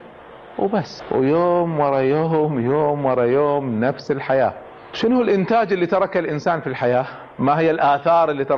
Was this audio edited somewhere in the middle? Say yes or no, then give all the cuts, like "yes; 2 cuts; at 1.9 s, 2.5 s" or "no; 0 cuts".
no; 0 cuts